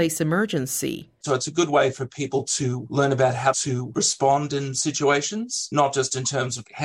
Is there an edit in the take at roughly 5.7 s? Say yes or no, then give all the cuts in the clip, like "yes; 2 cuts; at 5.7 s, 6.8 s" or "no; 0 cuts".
no; 1 cut; at 1.2 s